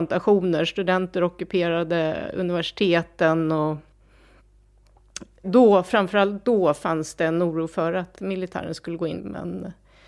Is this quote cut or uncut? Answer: cut